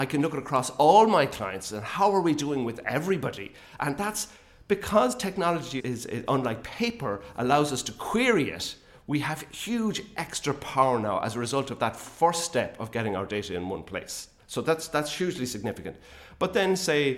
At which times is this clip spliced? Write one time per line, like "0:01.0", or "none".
0:03.8
0:05.8